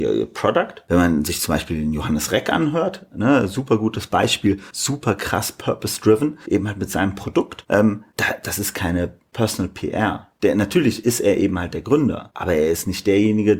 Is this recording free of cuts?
yes; 0 cuts

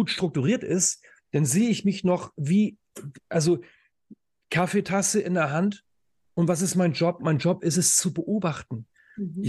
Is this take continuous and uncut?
yes; 0 cuts

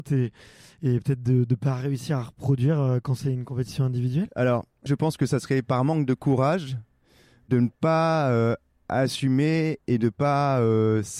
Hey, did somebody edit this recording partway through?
yes; 1 cut; at 4.9 s

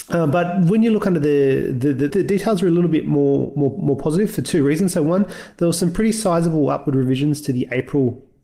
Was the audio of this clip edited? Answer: yes; 1 cut; at 2.1 s

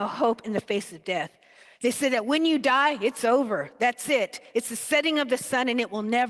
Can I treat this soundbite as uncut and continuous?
yes; 0 cuts

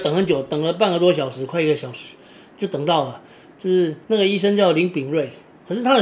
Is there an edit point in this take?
yes; 1 cut; at 4.0 s

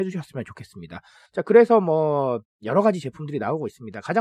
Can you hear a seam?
yes; 1 cut; at 1.2 s

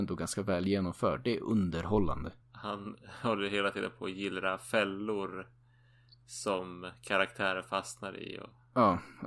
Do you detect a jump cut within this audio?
yes; 1 cut; at 2.4 s

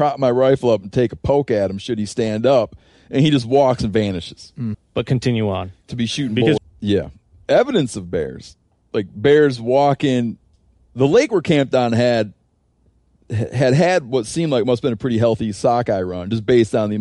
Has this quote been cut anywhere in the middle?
yes; 2 cuts; at 4.7 s, 6.6 s

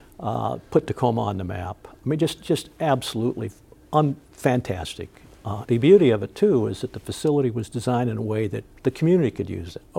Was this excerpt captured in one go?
no; 1 cut; at 5.7 s

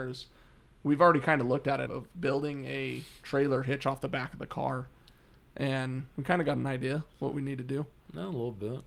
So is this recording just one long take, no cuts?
no; 1 cut; at 1.9 s

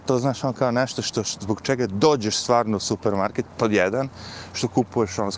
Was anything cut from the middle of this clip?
no; 0 cuts

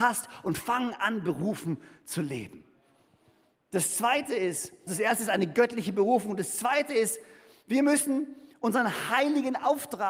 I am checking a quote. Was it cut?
yes; 1 cut; at 4.9 s

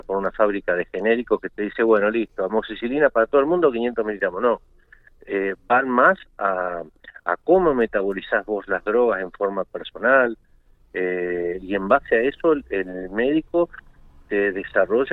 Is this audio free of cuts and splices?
yes; 0 cuts

